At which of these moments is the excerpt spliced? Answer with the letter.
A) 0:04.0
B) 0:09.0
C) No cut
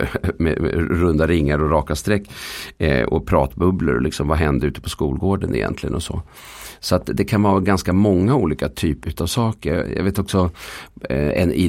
B